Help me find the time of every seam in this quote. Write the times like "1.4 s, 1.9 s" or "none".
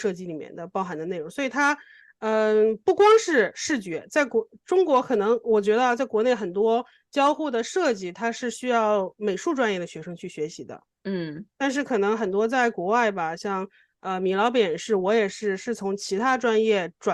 none